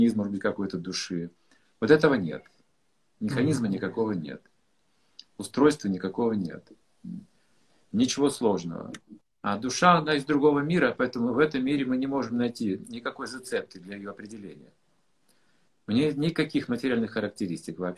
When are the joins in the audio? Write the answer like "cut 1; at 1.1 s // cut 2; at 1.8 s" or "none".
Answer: cut 1; at 9.2 s